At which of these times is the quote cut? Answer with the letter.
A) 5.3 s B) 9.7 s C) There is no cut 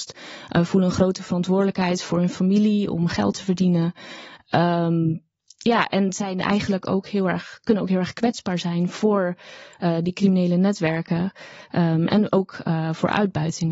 C